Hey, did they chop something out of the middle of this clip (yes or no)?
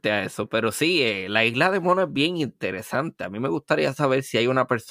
no